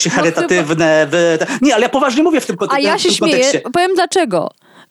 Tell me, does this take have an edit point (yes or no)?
no